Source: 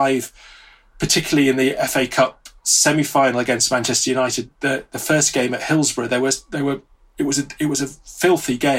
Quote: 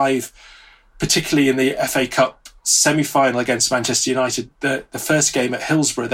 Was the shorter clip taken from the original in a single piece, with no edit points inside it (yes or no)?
yes